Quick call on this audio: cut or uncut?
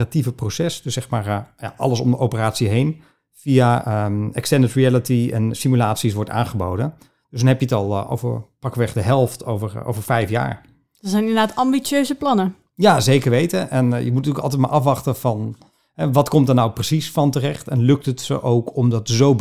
uncut